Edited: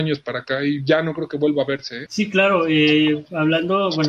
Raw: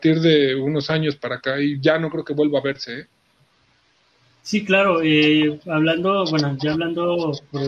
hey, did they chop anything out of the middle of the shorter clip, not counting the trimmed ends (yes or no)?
yes